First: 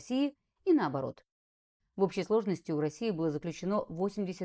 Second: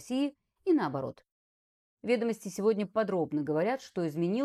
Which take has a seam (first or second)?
first